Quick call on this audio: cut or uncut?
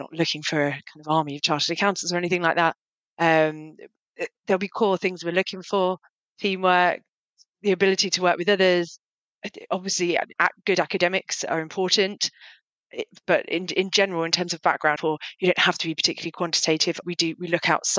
cut